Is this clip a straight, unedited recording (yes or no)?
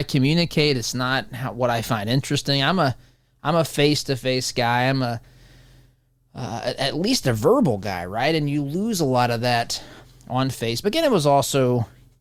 yes